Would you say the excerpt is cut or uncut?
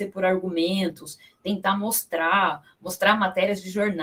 uncut